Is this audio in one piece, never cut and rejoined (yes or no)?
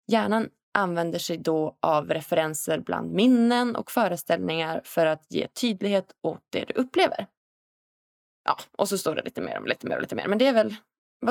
yes